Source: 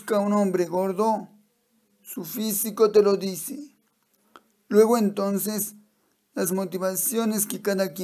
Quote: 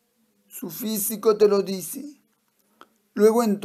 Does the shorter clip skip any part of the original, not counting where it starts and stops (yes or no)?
no